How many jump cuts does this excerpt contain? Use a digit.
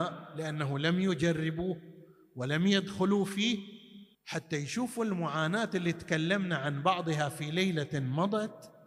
1